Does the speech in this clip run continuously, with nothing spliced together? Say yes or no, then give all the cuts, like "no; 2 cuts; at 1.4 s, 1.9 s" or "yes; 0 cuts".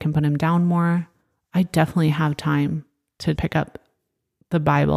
no; 1 cut; at 3.3 s